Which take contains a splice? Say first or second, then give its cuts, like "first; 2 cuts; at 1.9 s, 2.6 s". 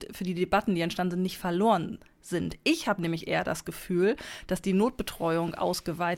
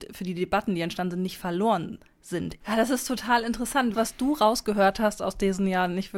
second; 2 cuts; at 2.6 s, 3.9 s